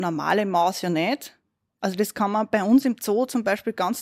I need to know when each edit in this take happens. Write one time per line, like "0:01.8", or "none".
0:01.7